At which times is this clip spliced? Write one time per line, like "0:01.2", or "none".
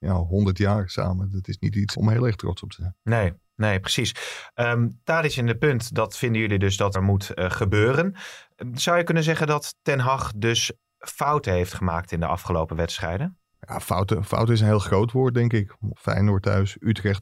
0:01.9
0:06.9
0:16.0